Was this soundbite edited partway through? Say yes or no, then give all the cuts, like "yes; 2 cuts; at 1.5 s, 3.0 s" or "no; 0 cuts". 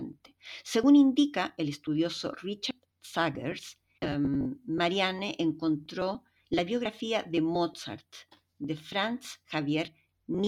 yes; 1 cut; at 4.0 s